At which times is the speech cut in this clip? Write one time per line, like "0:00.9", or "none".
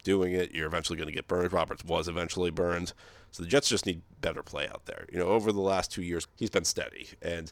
0:06.2

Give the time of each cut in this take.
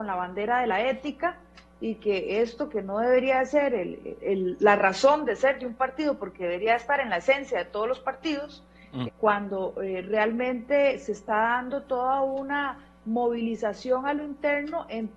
0:04.2
0:09.1

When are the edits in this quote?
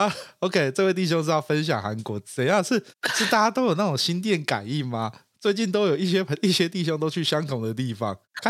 none

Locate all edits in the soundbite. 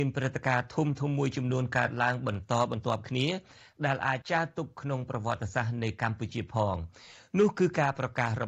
0:04.2

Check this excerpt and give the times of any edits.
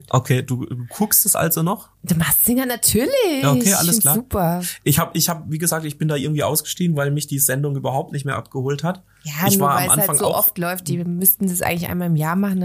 0:01.9

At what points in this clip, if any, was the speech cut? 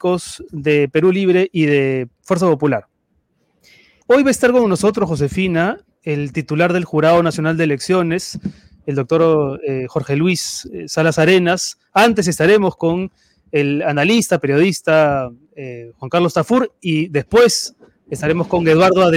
0:04.0

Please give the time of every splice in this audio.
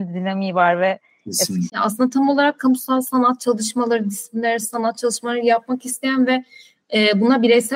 0:01.7

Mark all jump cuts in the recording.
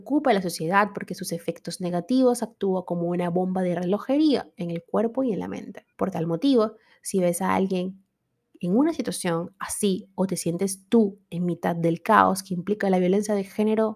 0:05.9

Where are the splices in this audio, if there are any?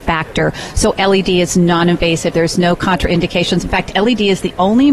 0:02.3

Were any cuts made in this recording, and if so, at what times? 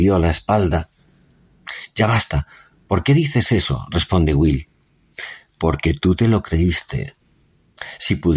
none

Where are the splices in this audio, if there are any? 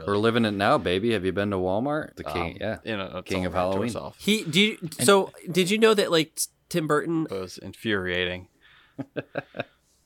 0:02.1
0:07.3

